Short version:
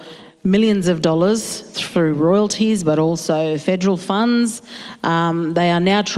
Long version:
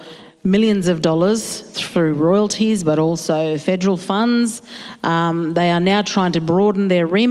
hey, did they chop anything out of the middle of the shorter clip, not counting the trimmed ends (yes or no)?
no